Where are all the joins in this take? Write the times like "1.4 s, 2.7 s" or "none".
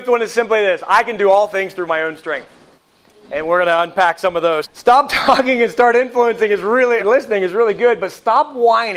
4.6 s, 7.0 s